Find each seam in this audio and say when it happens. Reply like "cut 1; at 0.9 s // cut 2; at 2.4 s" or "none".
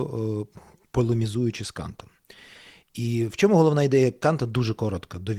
none